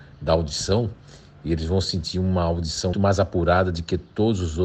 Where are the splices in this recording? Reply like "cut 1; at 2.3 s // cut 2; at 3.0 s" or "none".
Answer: cut 1; at 2.9 s